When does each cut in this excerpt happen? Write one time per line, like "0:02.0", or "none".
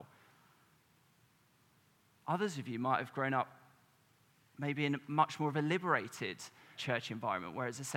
0:06.7